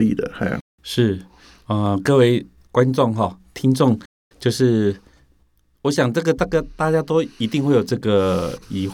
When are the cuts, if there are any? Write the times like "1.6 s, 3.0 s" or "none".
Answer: none